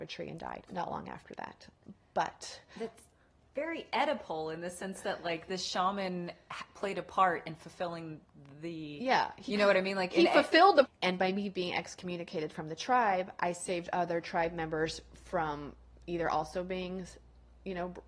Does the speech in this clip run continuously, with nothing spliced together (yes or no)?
no